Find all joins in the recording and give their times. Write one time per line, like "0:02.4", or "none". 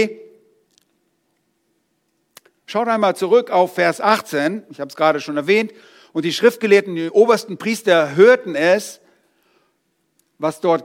none

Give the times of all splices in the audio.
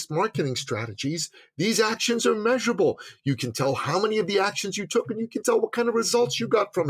none

